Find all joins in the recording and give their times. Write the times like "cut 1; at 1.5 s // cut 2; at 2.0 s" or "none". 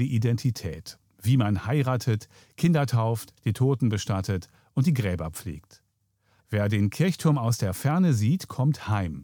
cut 1; at 3.4 s // cut 2; at 6.4 s